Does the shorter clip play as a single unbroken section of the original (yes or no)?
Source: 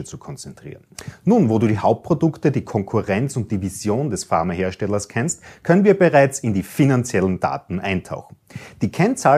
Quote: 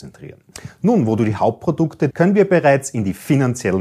no